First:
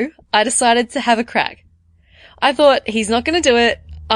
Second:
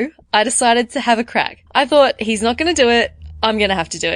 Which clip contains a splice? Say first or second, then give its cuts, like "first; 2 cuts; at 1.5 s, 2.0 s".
second; 1 cut; at 1.7 s